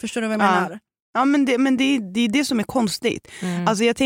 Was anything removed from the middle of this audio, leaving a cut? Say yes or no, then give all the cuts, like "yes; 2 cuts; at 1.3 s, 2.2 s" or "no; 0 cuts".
no; 0 cuts